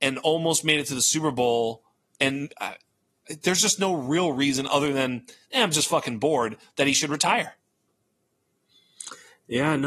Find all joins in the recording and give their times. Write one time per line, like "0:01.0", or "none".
none